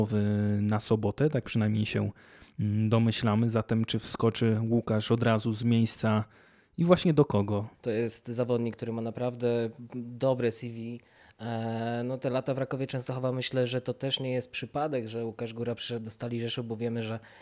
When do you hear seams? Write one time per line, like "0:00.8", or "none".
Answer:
0:07.7